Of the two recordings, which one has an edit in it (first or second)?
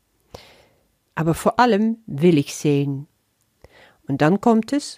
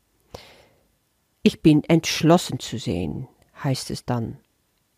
first